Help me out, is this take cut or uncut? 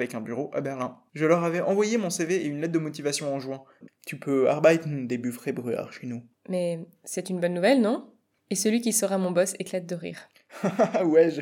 cut